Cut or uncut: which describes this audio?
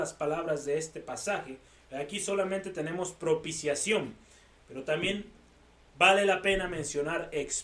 uncut